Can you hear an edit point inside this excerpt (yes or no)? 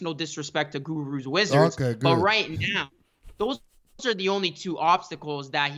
no